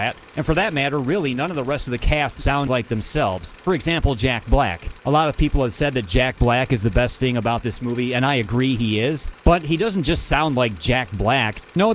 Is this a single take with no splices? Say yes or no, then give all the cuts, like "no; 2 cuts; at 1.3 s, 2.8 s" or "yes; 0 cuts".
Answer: no; 1 cut; at 2.4 s